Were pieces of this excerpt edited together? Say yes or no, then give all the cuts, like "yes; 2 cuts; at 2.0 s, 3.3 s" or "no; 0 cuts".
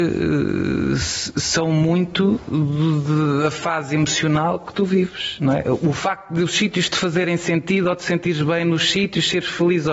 no; 0 cuts